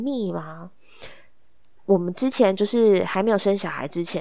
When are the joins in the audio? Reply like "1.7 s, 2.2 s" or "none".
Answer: none